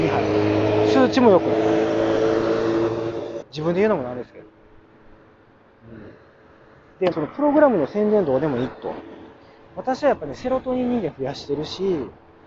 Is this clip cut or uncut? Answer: cut